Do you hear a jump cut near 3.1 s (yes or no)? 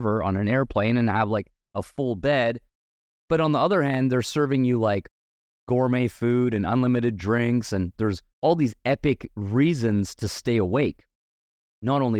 no